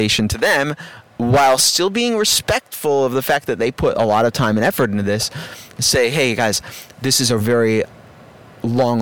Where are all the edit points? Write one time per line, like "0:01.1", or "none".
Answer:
0:07.4